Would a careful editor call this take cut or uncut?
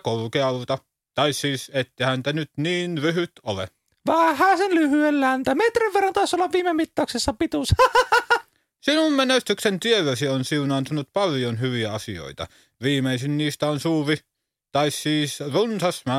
uncut